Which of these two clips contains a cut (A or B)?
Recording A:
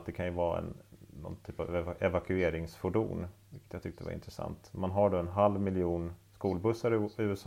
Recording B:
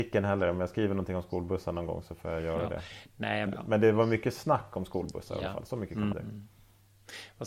B